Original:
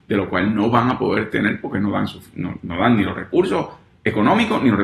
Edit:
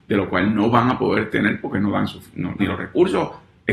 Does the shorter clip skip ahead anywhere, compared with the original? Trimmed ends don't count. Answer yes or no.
yes